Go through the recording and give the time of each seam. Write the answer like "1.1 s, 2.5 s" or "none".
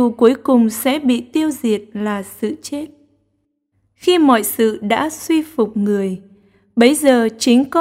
none